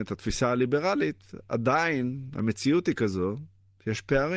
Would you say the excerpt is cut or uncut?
uncut